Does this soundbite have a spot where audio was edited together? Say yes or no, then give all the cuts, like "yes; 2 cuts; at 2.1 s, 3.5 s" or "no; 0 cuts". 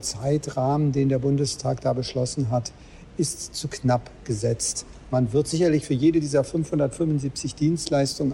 no; 0 cuts